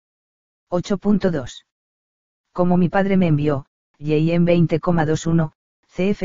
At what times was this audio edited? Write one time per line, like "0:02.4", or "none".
0:02.4
0:03.9